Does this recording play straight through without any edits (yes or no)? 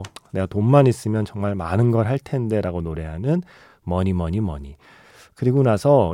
yes